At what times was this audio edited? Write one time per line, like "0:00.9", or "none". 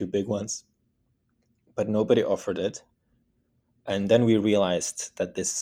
none